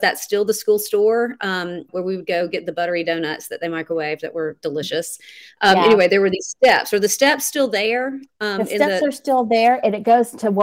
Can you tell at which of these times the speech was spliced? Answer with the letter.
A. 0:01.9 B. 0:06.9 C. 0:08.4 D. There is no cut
A